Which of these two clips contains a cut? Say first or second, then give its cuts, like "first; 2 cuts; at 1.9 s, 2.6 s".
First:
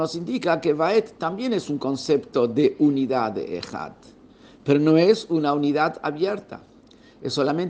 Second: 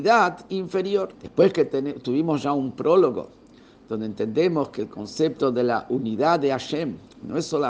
second; 1 cut; at 1.1 s